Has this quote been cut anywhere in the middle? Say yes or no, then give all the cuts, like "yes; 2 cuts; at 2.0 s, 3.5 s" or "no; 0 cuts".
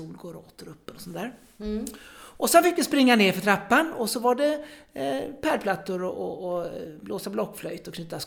no; 0 cuts